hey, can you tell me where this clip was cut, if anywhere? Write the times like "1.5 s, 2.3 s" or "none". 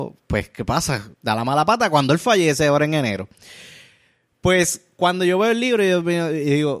1.1 s